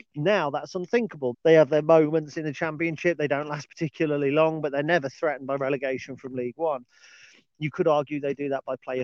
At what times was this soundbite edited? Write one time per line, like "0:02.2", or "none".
0:01.3